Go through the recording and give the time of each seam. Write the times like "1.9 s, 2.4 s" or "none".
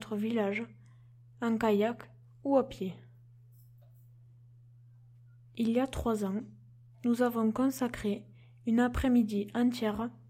none